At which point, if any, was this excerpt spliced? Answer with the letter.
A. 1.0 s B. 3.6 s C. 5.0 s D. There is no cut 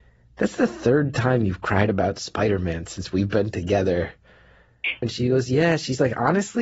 C